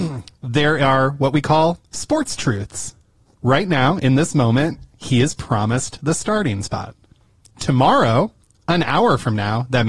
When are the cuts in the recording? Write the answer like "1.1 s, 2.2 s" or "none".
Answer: none